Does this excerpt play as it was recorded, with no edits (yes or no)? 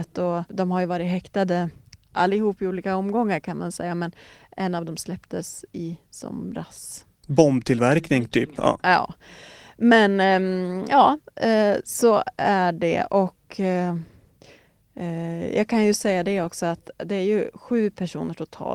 no